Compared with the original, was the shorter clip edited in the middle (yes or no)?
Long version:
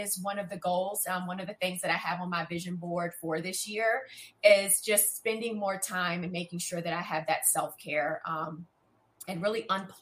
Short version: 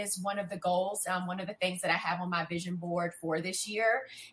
no